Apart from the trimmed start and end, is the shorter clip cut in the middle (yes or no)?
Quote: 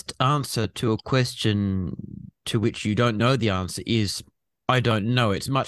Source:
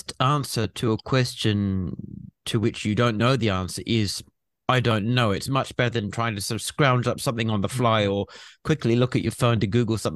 no